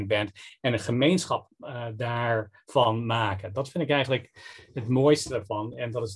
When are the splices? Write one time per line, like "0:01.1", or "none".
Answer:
none